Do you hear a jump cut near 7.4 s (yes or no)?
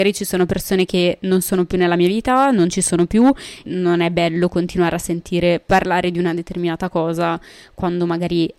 no